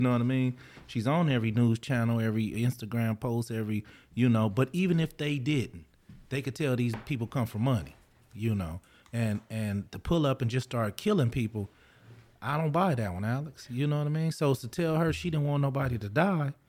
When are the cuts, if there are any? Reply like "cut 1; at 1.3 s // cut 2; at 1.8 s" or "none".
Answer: none